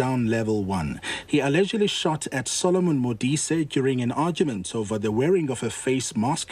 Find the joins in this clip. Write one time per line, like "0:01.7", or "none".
0:01.3